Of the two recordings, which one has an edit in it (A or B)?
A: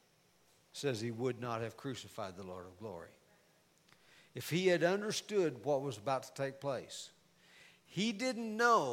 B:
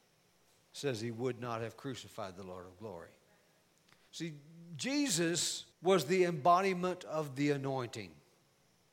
B